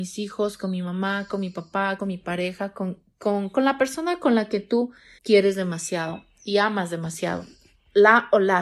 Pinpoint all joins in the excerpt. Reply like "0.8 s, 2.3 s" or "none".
2.0 s, 5.2 s